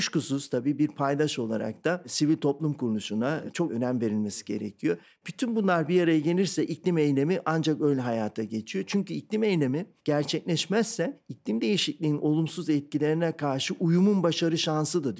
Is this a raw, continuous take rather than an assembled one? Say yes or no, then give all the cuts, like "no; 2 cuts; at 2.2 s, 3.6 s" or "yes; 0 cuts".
yes; 0 cuts